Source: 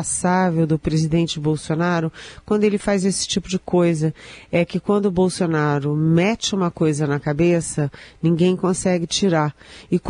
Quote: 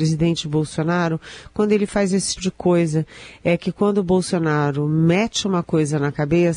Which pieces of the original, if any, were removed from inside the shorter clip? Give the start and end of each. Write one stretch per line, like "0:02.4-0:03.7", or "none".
0:03.3-0:03.4